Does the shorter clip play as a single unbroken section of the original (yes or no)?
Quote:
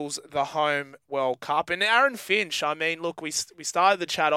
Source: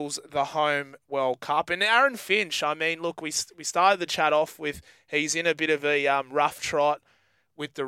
yes